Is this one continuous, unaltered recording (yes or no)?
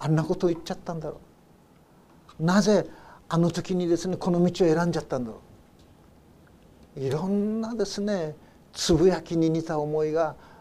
yes